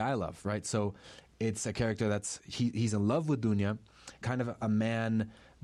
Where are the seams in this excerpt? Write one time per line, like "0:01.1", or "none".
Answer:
0:04.2